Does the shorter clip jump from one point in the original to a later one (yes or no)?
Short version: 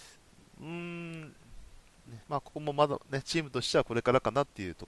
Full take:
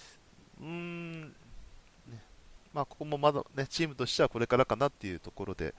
yes